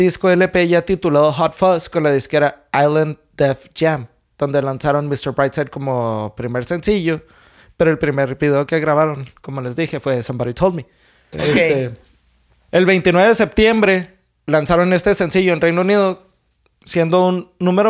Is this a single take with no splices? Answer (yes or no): no